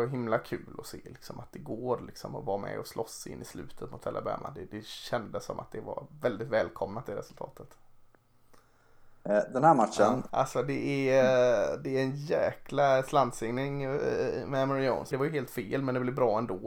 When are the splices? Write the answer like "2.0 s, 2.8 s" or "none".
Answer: 10.3 s, 15.1 s